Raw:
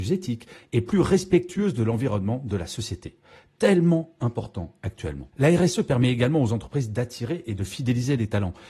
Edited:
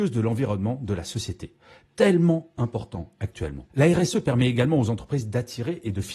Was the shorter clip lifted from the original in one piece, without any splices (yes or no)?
yes